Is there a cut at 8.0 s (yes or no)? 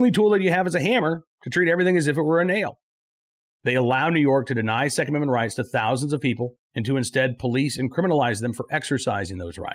no